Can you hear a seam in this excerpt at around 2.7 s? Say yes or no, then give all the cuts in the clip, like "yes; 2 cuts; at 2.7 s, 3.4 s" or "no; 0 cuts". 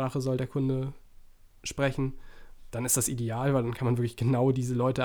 yes; 1 cut; at 2.7 s